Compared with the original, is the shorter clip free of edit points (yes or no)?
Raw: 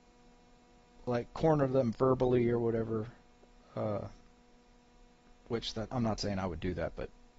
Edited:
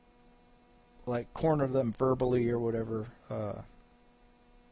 no